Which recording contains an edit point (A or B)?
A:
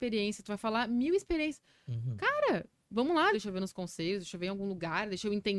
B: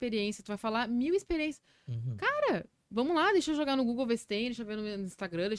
A